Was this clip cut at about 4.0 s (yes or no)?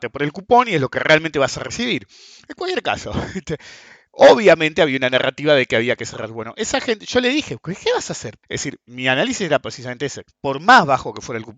no